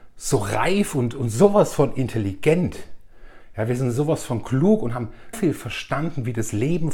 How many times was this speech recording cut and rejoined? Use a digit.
1